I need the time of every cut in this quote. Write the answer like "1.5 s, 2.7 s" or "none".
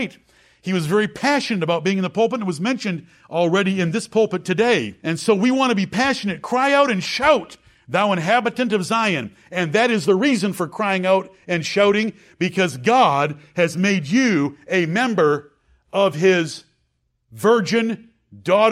5.0 s